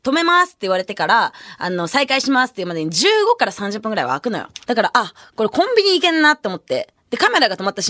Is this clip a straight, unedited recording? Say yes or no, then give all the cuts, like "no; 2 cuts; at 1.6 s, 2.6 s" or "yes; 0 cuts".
no; 1 cut; at 4.6 s